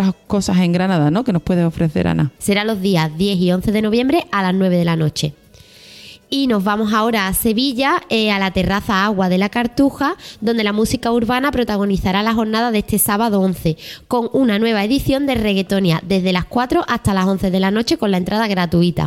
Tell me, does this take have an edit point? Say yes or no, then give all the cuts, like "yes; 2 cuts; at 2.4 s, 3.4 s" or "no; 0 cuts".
yes; 1 cut; at 2.4 s